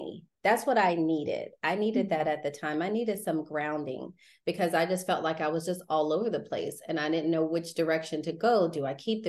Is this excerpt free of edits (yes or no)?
yes